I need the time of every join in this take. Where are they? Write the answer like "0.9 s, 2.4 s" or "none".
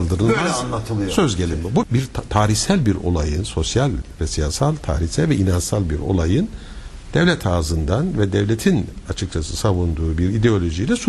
1.8 s